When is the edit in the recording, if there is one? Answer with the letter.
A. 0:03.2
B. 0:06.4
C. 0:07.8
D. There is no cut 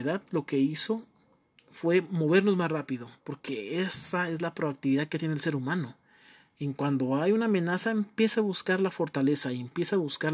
A